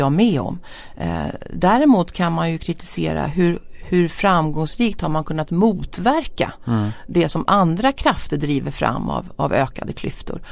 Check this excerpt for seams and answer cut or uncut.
uncut